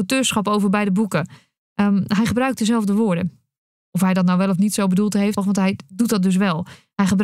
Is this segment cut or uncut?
cut